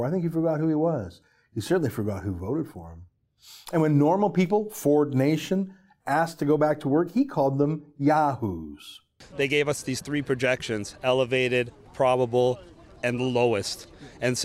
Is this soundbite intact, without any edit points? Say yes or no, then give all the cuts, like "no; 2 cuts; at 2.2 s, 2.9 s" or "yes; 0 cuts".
yes; 0 cuts